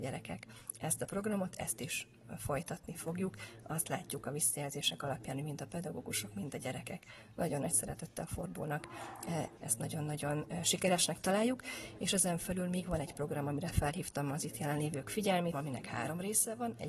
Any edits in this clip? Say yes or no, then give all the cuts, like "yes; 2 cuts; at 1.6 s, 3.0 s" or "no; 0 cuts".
yes; 2 cuts; at 9.6 s, 15.5 s